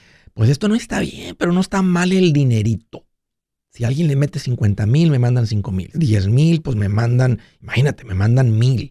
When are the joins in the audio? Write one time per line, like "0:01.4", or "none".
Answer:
0:05.9